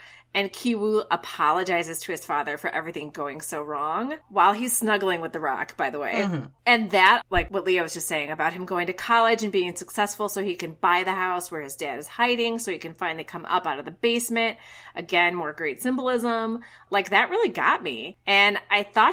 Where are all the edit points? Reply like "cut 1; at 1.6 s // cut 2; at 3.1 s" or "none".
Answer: cut 1; at 7.2 s